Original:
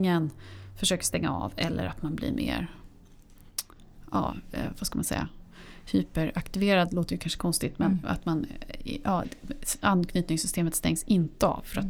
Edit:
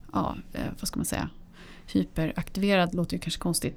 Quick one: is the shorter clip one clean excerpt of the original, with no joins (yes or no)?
yes